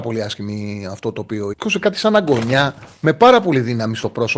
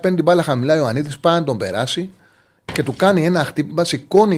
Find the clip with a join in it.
first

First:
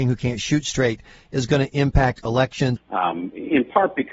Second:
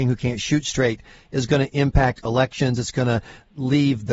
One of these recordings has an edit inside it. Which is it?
first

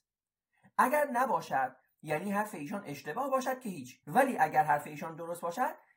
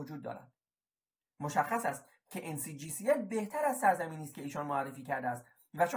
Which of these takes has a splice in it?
first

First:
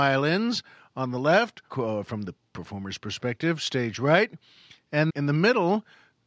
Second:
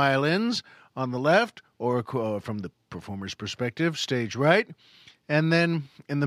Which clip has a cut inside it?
first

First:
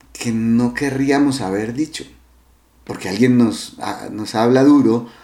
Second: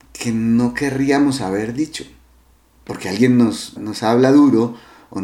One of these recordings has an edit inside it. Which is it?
second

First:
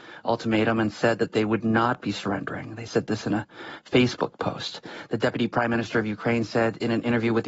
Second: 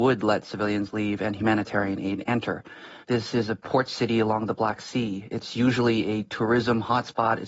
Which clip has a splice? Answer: second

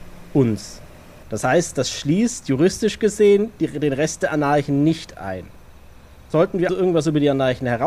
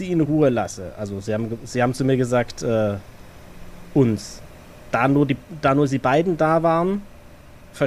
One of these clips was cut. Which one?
first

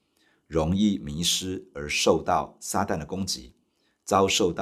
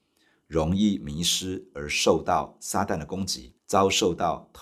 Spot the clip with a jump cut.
second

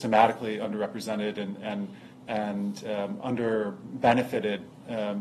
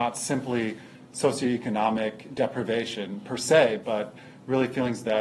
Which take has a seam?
second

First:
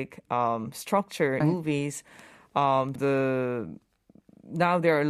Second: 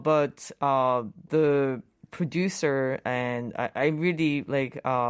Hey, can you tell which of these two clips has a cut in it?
first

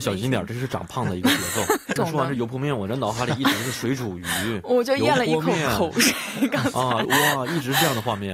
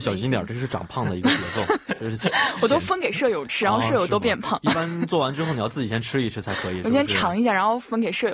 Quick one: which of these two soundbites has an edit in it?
first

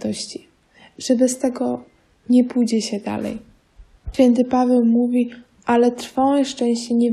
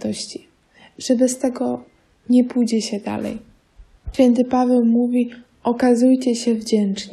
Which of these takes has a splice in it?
first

